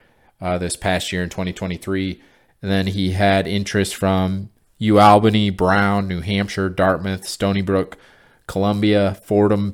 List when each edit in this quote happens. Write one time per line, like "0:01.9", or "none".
0:02.5